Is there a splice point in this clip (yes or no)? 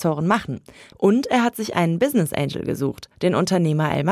yes